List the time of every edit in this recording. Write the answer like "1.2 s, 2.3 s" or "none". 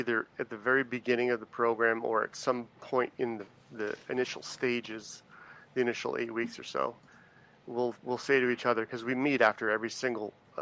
none